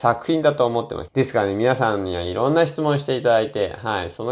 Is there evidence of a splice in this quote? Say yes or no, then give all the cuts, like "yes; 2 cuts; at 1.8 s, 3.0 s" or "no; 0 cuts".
yes; 1 cut; at 1.1 s